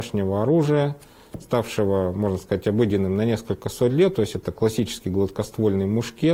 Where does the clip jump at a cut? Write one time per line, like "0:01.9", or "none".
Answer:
none